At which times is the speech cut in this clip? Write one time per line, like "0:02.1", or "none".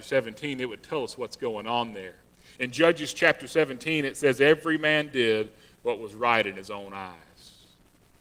none